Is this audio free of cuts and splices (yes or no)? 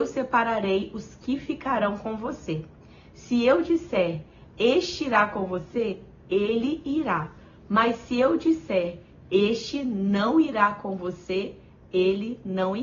yes